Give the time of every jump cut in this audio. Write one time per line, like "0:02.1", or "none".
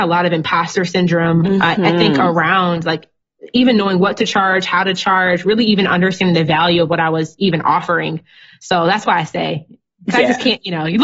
none